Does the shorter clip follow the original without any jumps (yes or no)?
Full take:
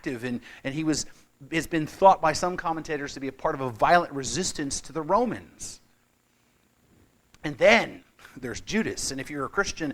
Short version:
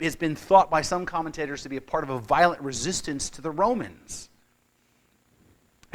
yes